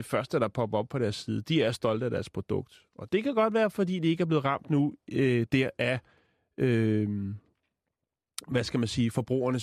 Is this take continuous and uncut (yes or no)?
yes